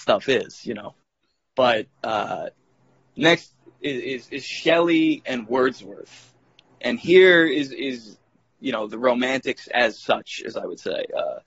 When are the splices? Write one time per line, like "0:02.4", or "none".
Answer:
0:01.0

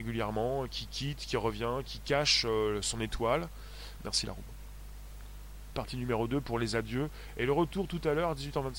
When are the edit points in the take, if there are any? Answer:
0:04.0
0:05.7

